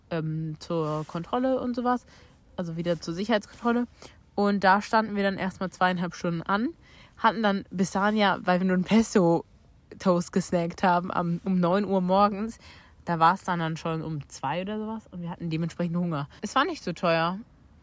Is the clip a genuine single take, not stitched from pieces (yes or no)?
no